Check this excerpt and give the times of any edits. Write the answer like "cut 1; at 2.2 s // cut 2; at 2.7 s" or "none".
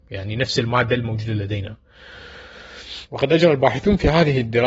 cut 1; at 3.1 s